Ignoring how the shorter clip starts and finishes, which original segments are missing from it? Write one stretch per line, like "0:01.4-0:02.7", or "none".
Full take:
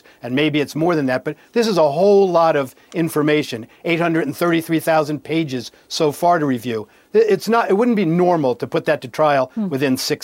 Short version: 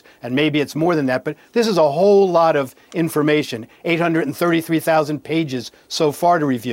none